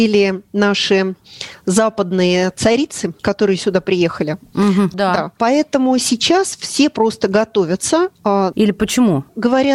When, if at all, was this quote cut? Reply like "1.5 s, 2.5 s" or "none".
3.2 s, 4.9 s, 8.5 s

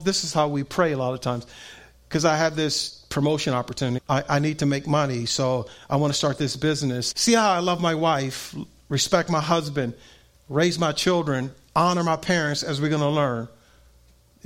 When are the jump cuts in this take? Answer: 4.0 s, 7.1 s

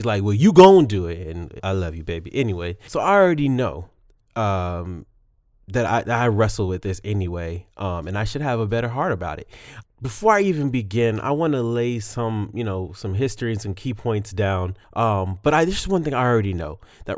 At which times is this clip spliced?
1.6 s, 9.8 s, 14.8 s

